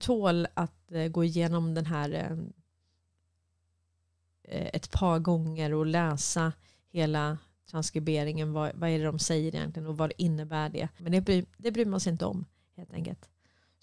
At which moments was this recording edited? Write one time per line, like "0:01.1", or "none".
0:11.0